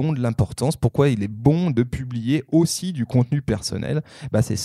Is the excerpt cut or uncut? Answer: uncut